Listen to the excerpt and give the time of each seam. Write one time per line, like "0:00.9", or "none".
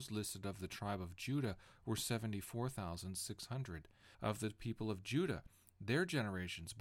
0:04.1